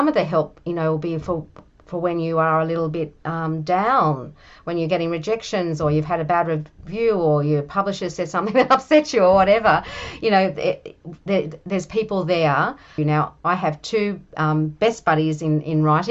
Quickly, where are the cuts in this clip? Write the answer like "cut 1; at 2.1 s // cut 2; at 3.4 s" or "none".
cut 1; at 13.0 s